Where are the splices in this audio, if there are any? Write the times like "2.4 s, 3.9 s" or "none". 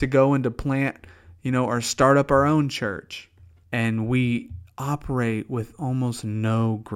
3.6 s